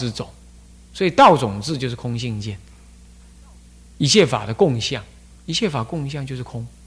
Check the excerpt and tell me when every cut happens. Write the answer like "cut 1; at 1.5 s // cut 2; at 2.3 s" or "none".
none